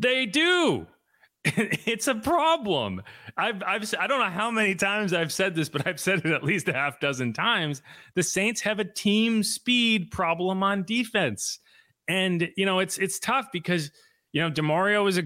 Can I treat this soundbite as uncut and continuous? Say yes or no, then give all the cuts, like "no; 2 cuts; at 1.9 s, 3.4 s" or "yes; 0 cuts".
yes; 0 cuts